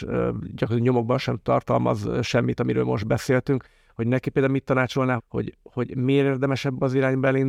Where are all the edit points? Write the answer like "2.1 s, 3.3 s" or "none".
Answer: 5.2 s